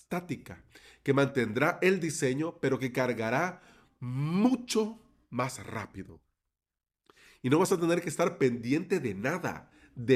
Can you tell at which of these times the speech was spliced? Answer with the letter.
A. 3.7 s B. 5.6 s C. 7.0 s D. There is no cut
D